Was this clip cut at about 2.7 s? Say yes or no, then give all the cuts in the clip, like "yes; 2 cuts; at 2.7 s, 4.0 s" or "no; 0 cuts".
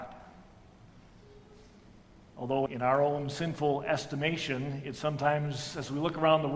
yes; 1 cut; at 2.7 s